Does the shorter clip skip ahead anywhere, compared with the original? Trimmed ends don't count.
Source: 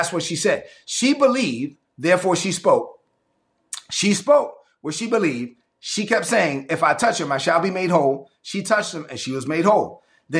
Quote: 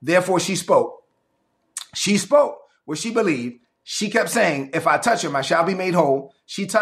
no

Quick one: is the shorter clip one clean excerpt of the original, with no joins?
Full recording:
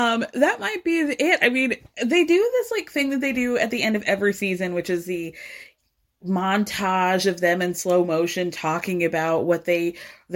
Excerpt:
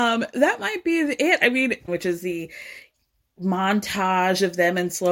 no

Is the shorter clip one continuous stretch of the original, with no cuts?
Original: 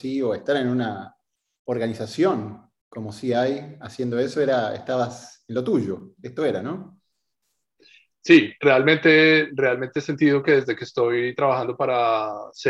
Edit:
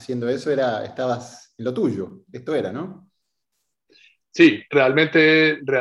yes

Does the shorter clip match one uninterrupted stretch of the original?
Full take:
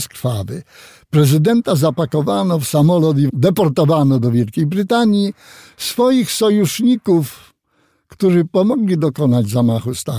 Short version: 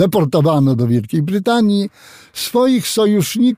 yes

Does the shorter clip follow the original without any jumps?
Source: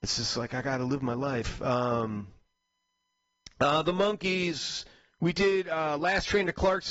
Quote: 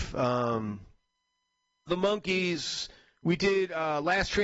no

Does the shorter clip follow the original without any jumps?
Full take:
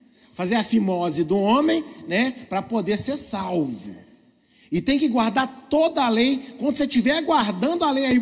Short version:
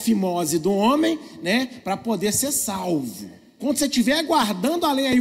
no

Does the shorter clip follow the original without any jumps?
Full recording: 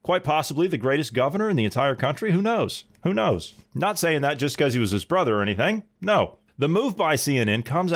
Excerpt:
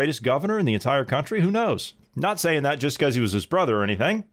no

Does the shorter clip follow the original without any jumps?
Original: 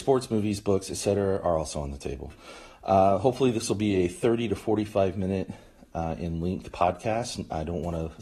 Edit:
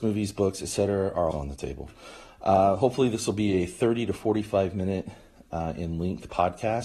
no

